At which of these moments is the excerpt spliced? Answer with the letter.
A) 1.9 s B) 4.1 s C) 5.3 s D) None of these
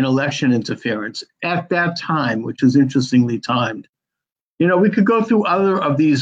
D